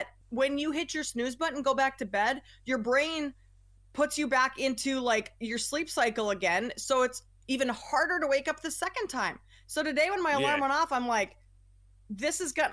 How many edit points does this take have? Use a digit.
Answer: 0